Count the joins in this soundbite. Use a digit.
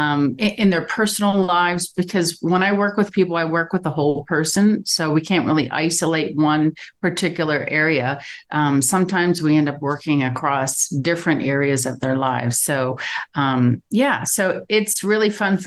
0